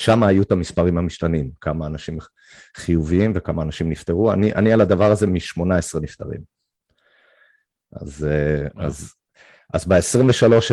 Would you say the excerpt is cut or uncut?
uncut